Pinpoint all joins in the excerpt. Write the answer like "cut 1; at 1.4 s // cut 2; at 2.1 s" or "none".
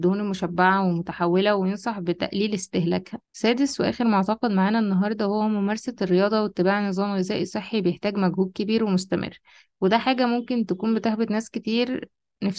cut 1; at 3.2 s